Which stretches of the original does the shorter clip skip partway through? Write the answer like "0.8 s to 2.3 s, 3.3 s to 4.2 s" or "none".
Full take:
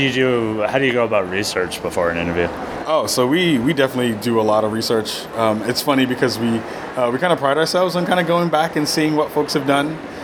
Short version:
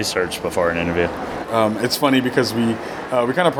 2.8 s to 5.3 s